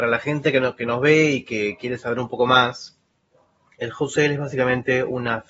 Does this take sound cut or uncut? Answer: uncut